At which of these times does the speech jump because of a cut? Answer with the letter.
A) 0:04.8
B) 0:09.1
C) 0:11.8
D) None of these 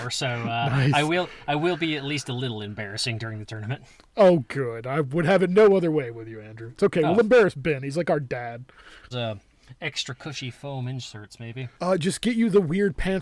B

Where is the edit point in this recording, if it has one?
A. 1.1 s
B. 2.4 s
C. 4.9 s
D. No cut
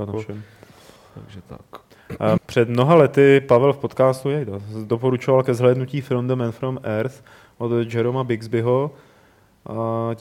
B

